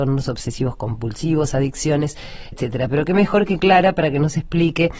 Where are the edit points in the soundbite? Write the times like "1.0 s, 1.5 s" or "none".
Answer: 2.5 s